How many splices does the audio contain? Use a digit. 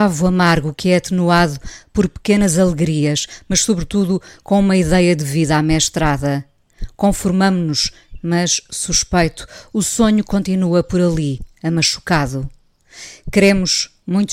0